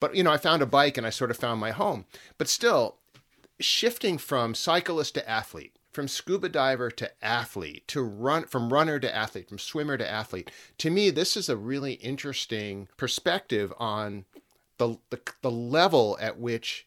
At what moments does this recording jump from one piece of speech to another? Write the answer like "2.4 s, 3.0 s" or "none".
5.8 s, 12.9 s